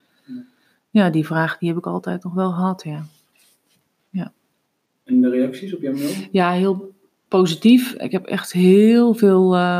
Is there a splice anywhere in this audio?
no; 0 cuts

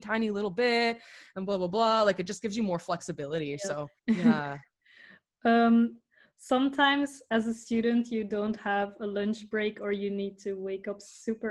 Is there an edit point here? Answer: yes; 1 cut; at 4.0 s

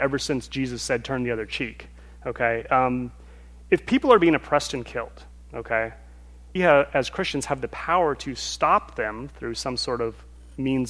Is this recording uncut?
no; 1 cut; at 6.6 s

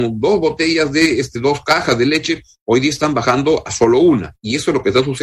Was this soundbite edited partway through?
no; 0 cuts

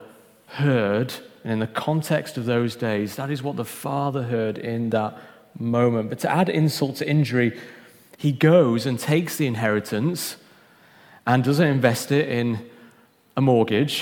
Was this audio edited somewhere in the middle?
no; 0 cuts

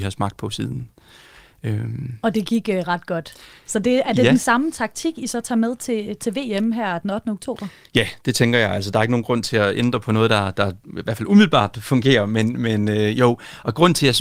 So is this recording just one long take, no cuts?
yes; 0 cuts

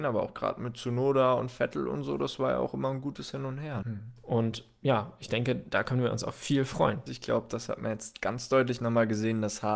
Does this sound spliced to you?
yes; 2 cuts; at 3.8 s, 7.1 s

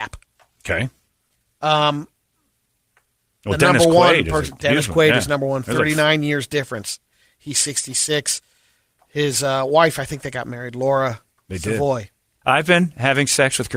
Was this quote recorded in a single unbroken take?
no; 1 cut; at 12.4 s

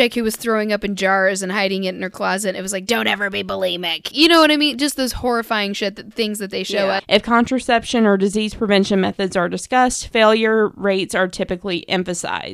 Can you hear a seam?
yes; 2 cuts; at 4.1 s, 7.0 s

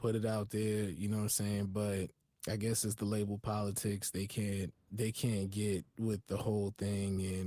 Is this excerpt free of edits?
no; 3 cuts; at 2.3 s, 4.7 s, 5.9 s

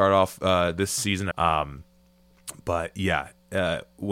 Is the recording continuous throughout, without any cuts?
no; 1 cut; at 1.3 s

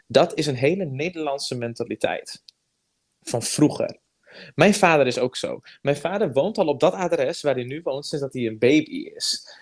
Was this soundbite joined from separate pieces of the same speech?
no; 0 cuts

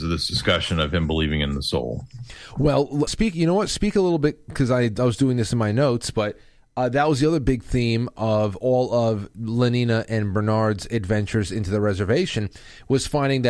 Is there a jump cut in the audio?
yes; 1 cut; at 3.1 s

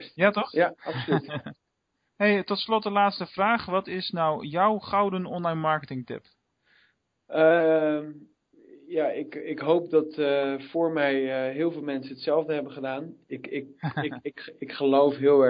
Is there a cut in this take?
no; 0 cuts

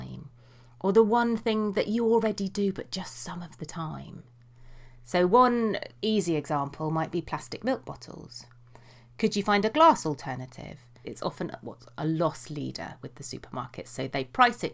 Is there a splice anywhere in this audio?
yes; 1 cut; at 11.0 s

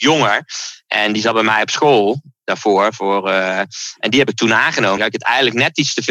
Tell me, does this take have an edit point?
yes; 1 cut; at 5.0 s

